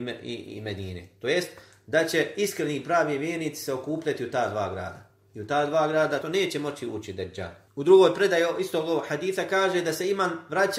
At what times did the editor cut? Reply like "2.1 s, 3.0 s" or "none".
6.2 s, 7.7 s